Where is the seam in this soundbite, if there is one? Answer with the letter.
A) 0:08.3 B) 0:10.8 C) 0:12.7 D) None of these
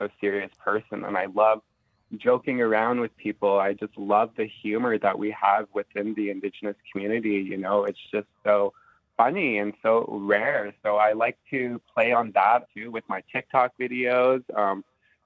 C